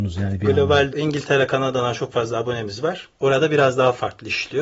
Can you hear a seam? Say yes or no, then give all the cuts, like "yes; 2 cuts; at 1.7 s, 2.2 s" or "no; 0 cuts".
yes; 1 cut; at 0.9 s